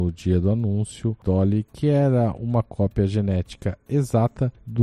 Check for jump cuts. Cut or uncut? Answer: cut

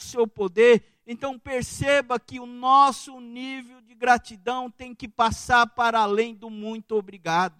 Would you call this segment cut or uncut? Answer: uncut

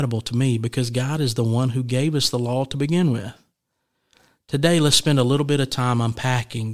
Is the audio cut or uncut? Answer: uncut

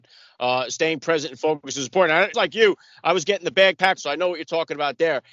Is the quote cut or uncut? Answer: cut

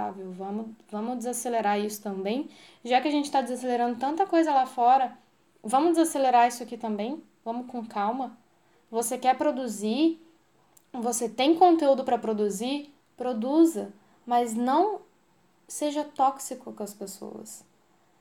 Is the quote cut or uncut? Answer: uncut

